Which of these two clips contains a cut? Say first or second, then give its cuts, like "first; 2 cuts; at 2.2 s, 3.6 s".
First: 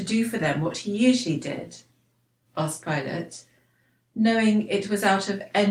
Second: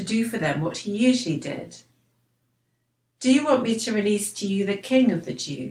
first; 1 cut; at 2.4 s